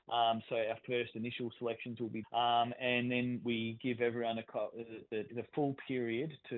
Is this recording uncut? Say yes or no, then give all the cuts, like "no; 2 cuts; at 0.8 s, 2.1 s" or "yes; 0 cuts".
no; 2 cuts; at 2.2 s, 5.3 s